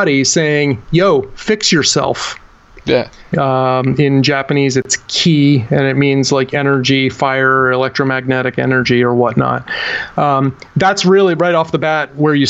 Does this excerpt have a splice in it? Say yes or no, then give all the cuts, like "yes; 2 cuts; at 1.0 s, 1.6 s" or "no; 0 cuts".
yes; 1 cut; at 3.3 s